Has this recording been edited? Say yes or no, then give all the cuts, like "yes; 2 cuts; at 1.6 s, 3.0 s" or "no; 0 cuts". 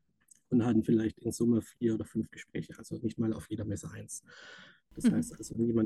yes; 1 cut; at 4.9 s